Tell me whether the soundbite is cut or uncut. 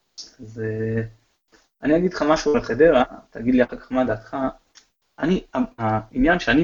uncut